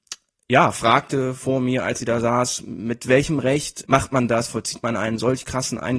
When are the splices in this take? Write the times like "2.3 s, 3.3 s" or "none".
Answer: 3.8 s

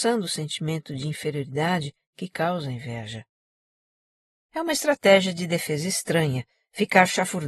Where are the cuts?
4.3 s

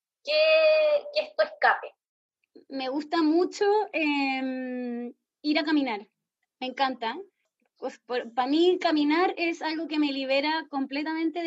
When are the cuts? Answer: 8.0 s

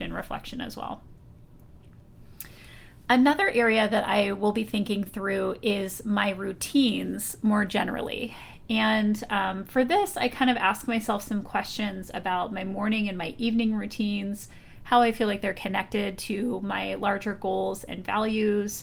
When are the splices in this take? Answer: none

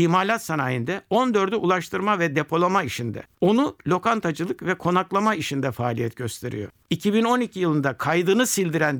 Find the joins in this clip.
none

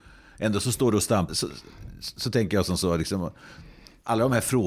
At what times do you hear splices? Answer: 1.3 s

